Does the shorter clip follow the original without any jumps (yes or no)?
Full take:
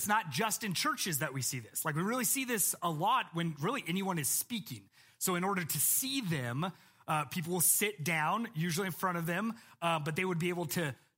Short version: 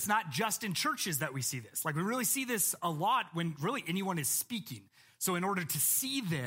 yes